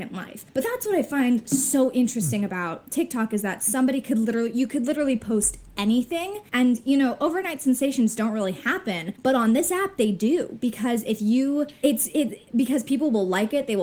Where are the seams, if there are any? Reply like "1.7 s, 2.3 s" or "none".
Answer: none